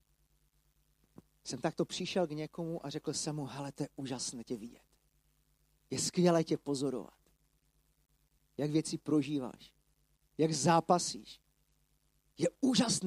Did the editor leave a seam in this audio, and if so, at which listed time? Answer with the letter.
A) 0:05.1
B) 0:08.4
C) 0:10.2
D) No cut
B